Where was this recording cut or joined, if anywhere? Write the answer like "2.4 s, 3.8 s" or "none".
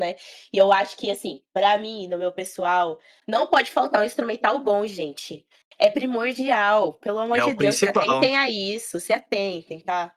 none